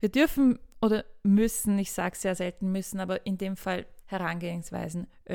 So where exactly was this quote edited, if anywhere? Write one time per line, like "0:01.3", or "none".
0:04.0